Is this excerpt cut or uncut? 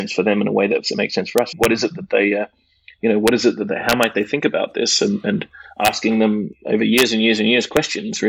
cut